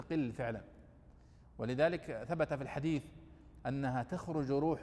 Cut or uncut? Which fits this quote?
uncut